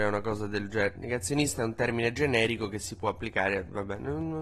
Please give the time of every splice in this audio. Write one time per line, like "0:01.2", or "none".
0:00.9